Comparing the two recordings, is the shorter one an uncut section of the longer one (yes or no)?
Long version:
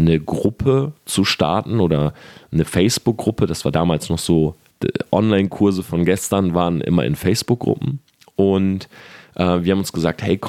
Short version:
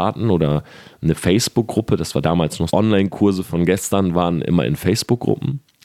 no